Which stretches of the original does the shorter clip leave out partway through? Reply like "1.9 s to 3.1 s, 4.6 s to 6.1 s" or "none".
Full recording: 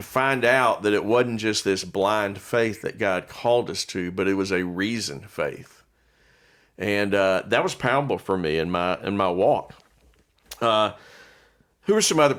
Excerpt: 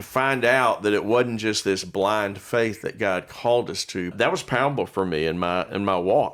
4.1 s to 7.4 s